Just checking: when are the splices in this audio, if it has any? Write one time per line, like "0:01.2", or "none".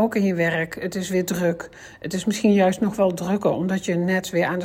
none